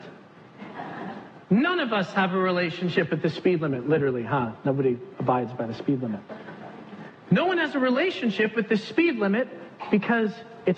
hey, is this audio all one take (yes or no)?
yes